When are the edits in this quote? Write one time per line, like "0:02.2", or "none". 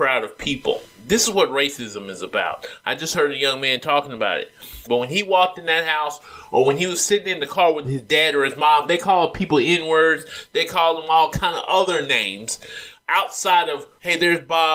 0:04.9